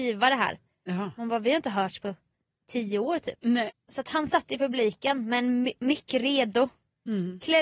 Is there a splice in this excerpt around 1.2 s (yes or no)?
no